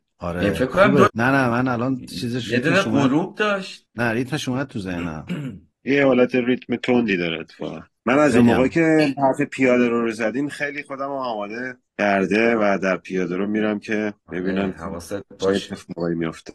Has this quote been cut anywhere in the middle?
yes; 1 cut; at 1.1 s

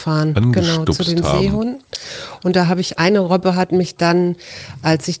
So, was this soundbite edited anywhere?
yes; 1 cut; at 3.0 s

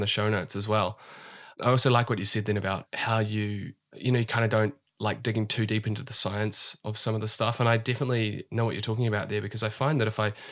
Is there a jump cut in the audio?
no; 0 cuts

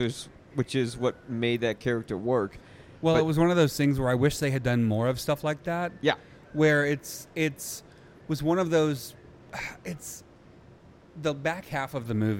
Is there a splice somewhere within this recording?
no; 0 cuts

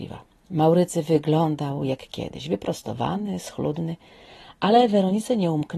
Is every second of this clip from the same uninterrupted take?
yes; 0 cuts

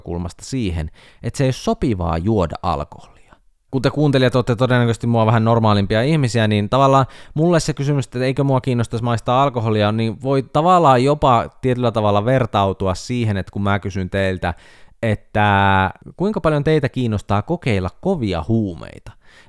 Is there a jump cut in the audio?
yes; 1 cut; at 3.7 s

